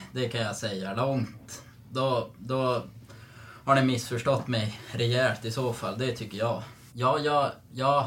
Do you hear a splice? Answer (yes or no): yes